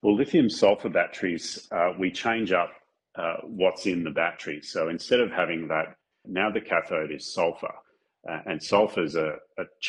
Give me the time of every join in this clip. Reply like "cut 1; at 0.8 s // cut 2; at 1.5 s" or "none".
cut 1; at 6.2 s